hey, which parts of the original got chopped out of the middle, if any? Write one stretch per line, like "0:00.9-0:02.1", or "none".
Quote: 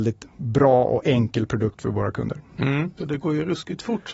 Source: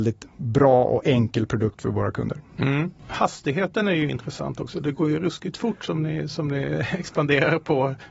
0:03.0-0:04.7